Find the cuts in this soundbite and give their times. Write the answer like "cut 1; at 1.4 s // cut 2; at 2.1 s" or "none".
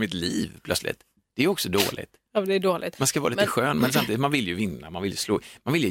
none